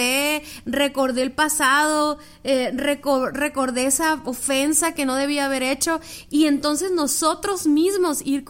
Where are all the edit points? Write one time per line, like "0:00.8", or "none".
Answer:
none